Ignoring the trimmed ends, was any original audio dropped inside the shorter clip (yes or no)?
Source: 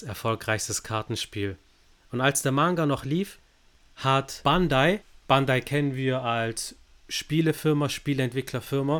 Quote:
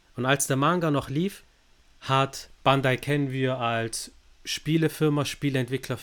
yes